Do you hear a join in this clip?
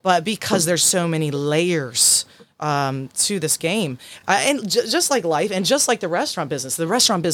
no; 0 cuts

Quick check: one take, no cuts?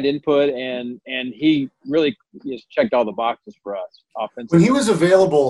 yes; 0 cuts

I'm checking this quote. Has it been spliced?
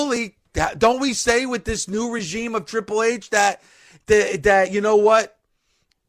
no; 0 cuts

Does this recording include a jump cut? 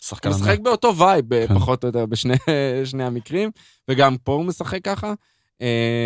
no; 0 cuts

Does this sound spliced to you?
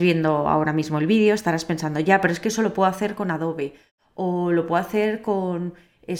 no; 0 cuts

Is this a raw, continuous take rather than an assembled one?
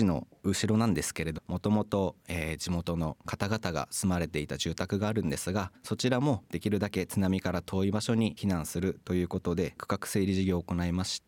no; 2 cuts; at 1.4 s, 8.4 s

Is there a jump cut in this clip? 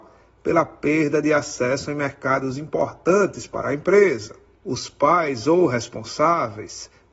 yes; 1 cut; at 4.5 s

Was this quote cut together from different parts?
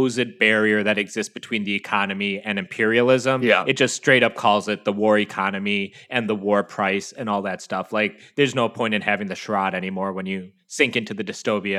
no; 0 cuts

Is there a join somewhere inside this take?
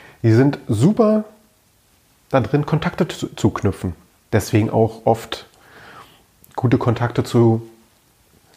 no; 0 cuts

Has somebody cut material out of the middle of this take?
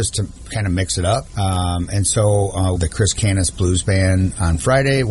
yes; 2 cuts; at 1.3 s, 2.8 s

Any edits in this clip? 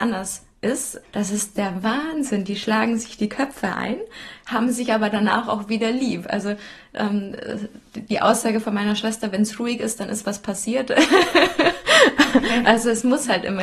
yes; 1 cut; at 1.0 s

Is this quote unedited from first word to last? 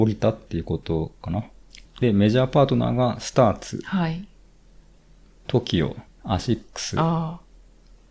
no; 2 cuts; at 1.9 s, 6.1 s

